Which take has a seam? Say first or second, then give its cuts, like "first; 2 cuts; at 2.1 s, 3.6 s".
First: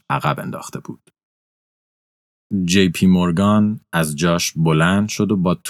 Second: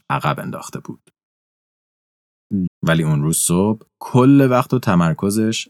second; 1 cut; at 2.7 s